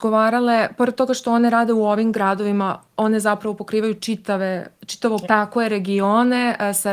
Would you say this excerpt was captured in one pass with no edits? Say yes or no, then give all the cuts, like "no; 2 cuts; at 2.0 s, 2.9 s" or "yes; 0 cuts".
no; 1 cut; at 5.2 s